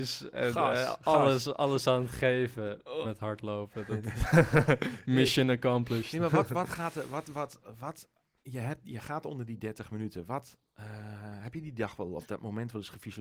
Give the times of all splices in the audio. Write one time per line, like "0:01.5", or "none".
0:03.0